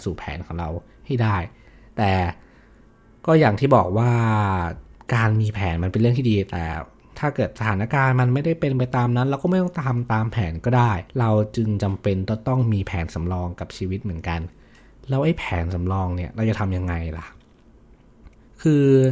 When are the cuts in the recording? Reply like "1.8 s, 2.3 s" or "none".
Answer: 11.1 s